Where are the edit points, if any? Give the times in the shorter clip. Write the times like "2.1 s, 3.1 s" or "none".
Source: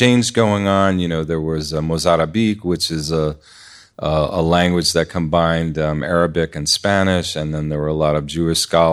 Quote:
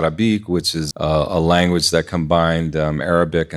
0.9 s